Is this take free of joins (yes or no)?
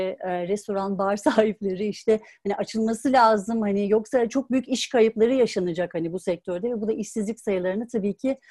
yes